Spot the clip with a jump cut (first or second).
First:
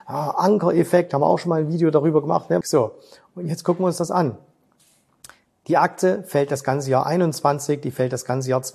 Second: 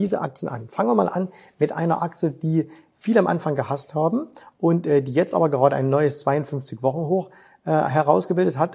first